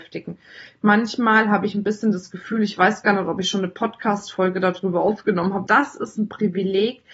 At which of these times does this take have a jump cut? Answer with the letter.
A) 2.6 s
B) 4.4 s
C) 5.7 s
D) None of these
C